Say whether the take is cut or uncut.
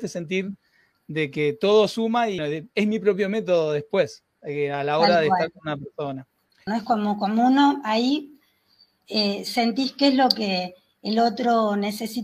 cut